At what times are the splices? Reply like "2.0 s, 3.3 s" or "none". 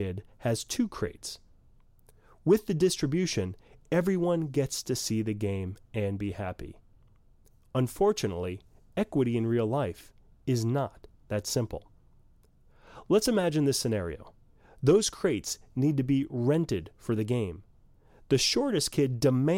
none